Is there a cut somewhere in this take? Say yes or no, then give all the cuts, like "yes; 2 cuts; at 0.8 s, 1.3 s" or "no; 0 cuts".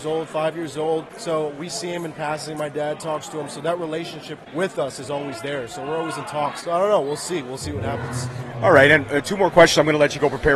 no; 0 cuts